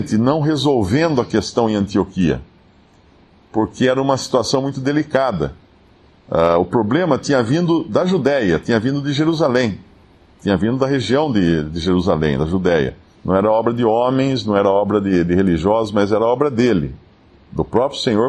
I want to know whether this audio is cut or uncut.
cut